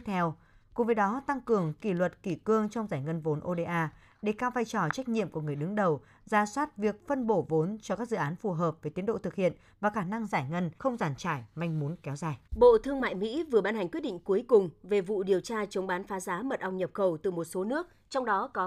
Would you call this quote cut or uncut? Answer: cut